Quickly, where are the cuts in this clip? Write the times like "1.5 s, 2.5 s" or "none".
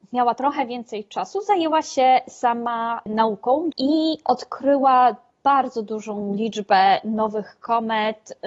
3.7 s